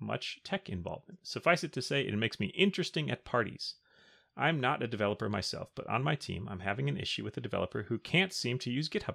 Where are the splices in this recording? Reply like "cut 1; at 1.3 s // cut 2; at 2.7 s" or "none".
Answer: none

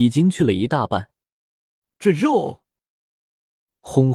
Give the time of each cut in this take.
none

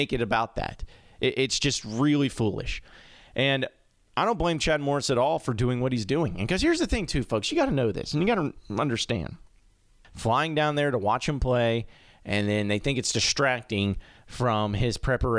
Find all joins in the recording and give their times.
cut 1; at 10.0 s

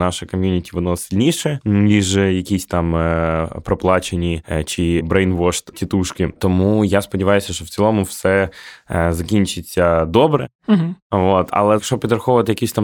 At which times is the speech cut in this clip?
none

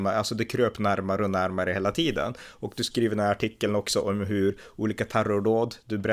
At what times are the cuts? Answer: none

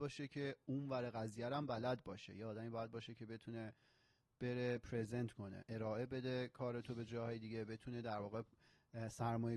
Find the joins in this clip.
none

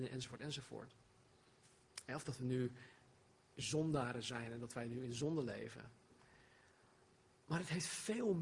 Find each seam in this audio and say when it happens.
none

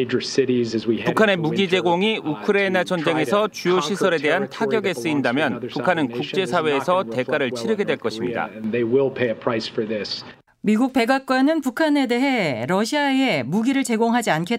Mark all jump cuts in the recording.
cut 1; at 10.5 s

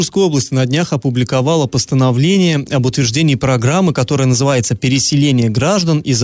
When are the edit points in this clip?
none

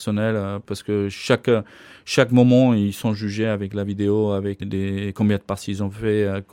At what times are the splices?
none

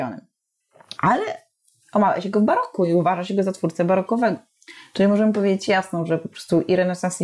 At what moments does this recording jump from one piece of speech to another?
cut 1; at 1.0 s

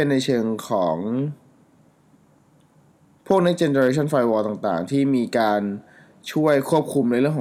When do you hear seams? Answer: none

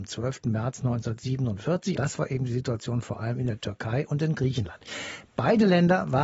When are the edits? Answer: cut 1; at 2.0 s

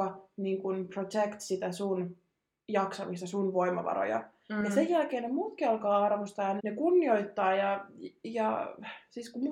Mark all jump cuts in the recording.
cut 1; at 6.6 s

